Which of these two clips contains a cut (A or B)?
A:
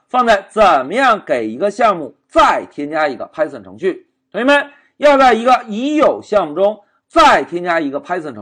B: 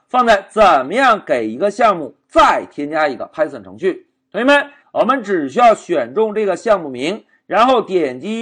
B